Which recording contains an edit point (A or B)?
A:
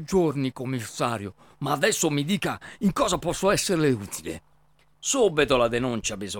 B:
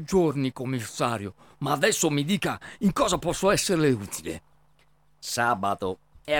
A